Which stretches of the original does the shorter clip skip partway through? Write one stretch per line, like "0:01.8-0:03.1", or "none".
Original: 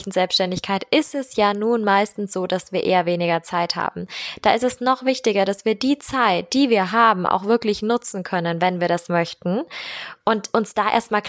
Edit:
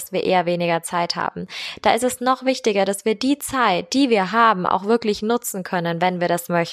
none